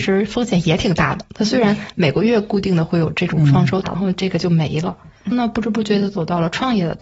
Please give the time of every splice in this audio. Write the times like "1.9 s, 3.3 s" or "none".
3.8 s